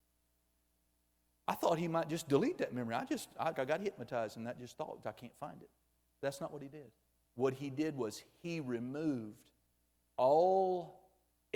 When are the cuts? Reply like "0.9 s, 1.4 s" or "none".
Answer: 3.5 s, 5.0 s, 7.3 s